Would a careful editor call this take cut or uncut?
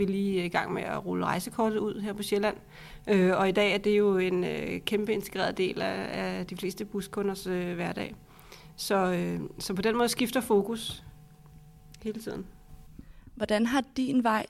uncut